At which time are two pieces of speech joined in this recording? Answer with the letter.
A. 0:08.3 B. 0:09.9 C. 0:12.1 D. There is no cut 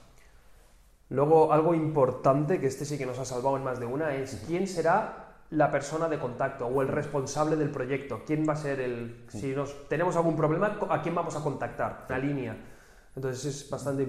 C